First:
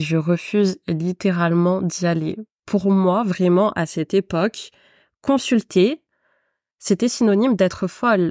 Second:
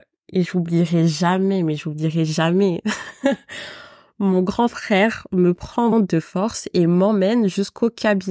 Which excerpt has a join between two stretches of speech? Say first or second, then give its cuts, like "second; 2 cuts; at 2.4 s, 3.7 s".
second; 1 cut; at 5.9 s